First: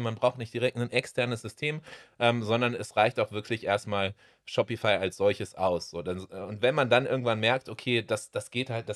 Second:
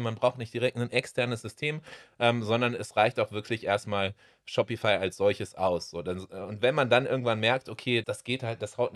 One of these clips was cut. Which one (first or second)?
second